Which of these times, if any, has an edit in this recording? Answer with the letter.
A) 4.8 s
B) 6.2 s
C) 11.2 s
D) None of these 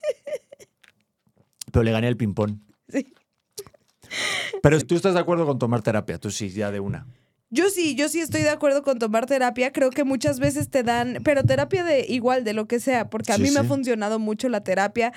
A